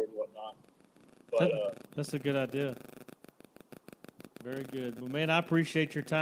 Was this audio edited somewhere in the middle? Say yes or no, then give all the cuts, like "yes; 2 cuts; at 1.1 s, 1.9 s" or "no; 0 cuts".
no; 0 cuts